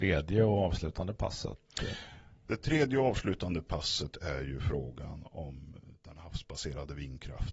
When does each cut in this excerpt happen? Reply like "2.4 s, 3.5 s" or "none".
none